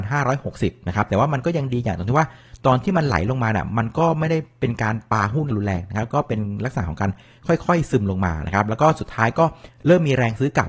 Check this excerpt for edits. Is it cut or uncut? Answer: cut